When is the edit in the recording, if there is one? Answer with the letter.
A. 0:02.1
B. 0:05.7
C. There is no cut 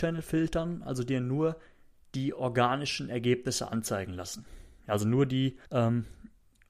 B